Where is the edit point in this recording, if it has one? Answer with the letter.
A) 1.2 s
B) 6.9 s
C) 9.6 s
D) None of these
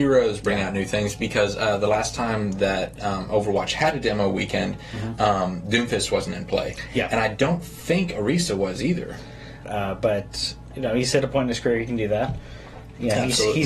C